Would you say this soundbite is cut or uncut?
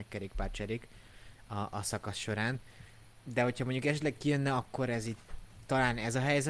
uncut